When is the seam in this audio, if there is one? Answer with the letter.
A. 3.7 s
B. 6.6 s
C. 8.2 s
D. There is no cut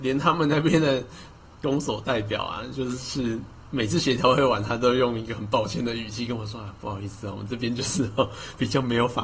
D